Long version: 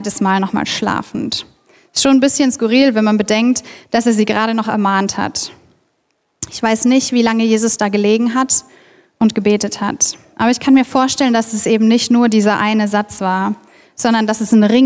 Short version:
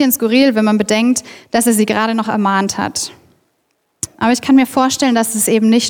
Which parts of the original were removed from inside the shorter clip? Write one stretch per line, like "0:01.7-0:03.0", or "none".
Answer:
0:06.5-0:10.2

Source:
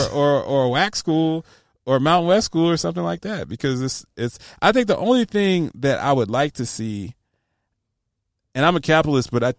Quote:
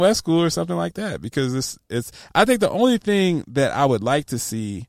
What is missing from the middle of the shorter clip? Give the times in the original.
none

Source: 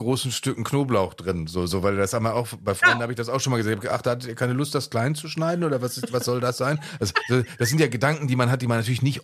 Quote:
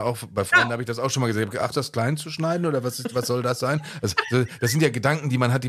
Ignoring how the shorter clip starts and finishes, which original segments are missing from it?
0:04.0-0:04.7

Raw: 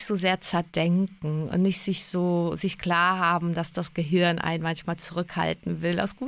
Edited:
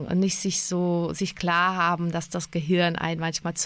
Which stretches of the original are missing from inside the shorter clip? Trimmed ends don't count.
none

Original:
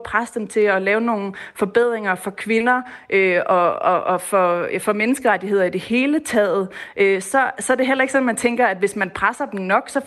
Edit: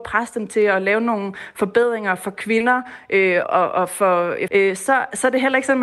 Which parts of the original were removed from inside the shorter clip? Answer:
0:03.4-0:03.8
0:04.8-0:06.9

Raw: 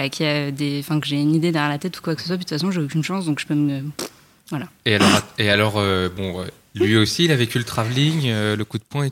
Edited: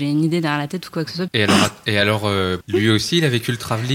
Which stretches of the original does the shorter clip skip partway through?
0:02.4-0:04.8
0:06.1-0:06.7

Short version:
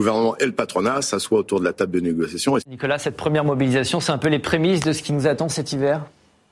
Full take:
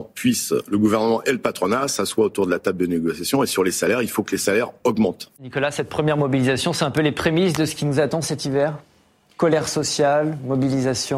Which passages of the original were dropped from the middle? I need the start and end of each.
0:03.5-0:05.3

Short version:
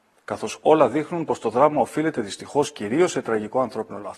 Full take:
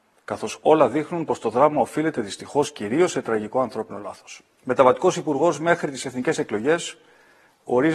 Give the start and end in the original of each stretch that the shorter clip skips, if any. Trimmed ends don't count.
none

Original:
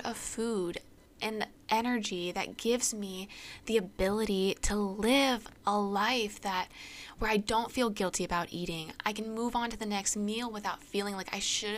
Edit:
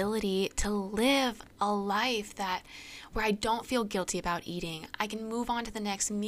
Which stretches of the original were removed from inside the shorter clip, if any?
none

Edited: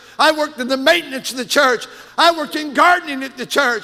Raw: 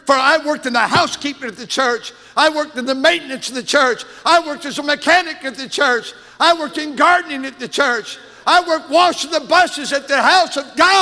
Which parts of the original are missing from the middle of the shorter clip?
0:04.2-0:06.3

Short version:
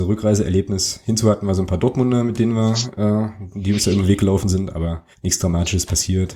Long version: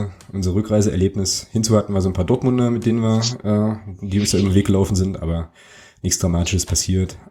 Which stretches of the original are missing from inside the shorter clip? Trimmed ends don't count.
0:05.6-0:05.9

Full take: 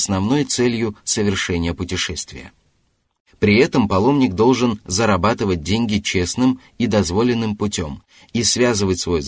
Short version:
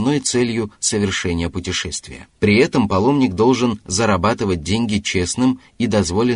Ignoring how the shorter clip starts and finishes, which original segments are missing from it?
0:02.6-0:03.3

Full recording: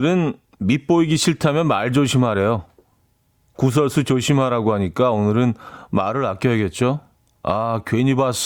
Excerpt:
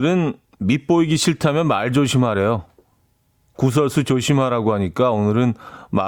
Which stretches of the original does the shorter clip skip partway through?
none

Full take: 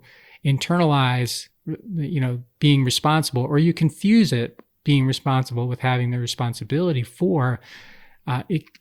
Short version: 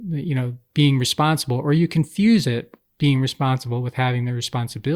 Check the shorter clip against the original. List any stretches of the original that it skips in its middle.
none

